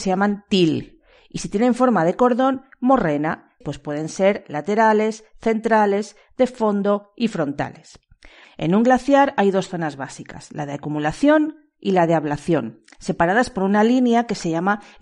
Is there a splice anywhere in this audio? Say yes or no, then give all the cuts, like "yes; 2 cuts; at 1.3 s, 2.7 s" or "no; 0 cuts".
yes; 2 cuts; at 3.6 s, 8.4 s